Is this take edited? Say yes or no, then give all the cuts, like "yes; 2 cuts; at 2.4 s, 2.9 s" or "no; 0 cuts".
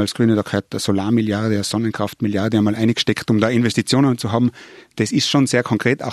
no; 0 cuts